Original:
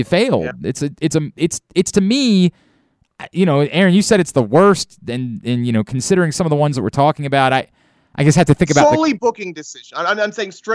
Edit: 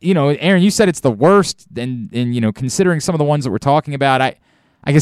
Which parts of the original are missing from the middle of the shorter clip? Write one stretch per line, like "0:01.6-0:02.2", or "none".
none